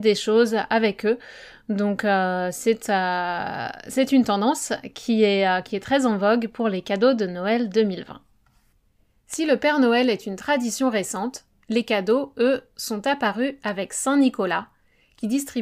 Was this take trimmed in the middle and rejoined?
no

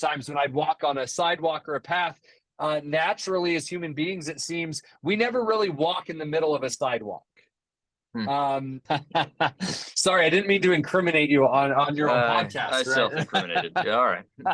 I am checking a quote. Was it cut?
yes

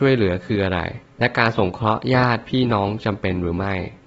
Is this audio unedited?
yes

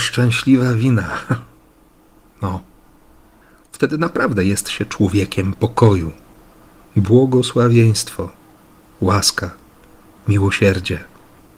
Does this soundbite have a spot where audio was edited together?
no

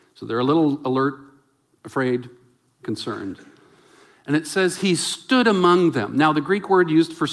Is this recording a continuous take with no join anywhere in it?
yes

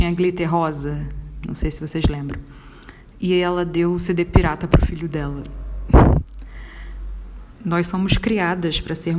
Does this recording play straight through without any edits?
no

